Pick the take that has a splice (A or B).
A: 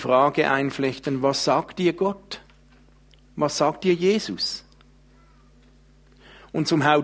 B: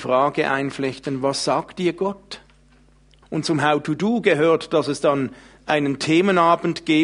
B